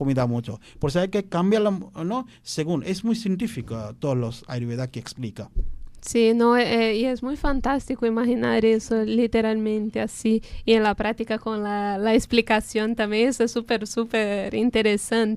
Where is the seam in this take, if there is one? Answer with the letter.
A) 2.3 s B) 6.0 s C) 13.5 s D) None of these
D